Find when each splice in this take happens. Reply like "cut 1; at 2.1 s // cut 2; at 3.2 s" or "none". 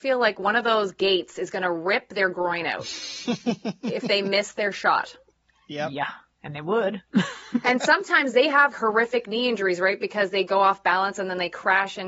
cut 1; at 8.7 s